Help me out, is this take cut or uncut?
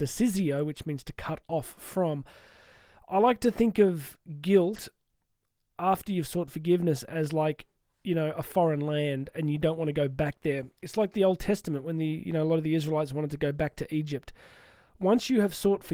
uncut